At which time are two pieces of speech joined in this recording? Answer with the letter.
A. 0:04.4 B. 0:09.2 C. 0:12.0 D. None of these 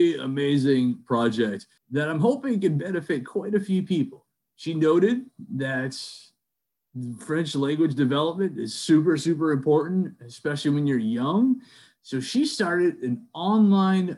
D